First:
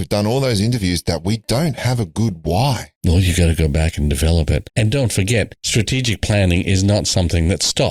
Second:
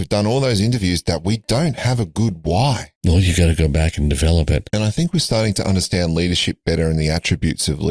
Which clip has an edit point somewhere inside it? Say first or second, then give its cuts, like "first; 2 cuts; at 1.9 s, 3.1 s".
second; 1 cut; at 4.7 s